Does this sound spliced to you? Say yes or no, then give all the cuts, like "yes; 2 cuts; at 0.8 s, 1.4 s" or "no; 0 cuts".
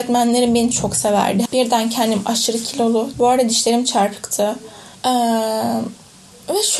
yes; 3 cuts; at 1.5 s, 3.1 s, 4.9 s